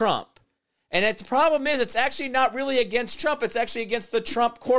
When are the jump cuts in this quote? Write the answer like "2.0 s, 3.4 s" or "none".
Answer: none